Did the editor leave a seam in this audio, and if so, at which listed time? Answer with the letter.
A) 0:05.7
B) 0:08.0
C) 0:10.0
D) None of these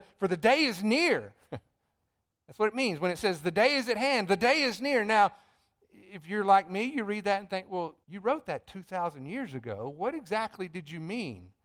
B